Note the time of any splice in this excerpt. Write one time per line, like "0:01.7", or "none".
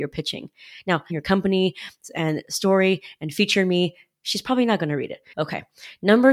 0:01.1
0:05.3